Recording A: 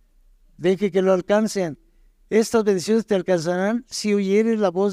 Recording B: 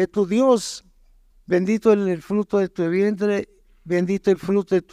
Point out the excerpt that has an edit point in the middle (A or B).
B